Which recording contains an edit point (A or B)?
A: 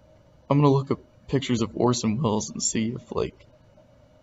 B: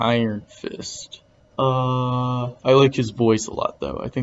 B